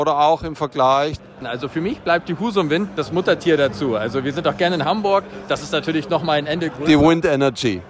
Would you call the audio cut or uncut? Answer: uncut